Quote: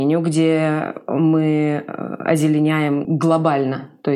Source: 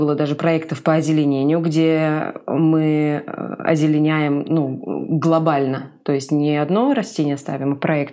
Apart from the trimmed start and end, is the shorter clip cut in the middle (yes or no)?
yes